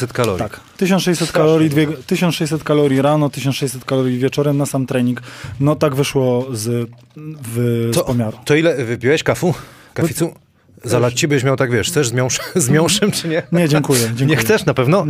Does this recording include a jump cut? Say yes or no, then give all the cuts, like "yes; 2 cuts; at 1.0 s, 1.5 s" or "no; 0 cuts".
no; 0 cuts